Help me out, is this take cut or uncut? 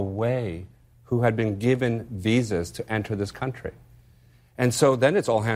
uncut